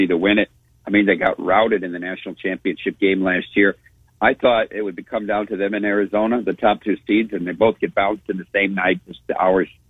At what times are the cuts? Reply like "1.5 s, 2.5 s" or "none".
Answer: none